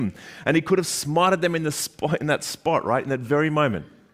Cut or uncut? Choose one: uncut